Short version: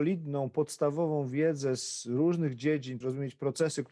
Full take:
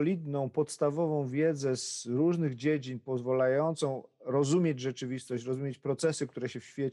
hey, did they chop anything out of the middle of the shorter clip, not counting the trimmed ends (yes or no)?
yes